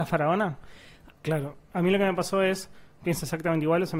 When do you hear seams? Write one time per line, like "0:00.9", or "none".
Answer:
0:01.2
0:02.9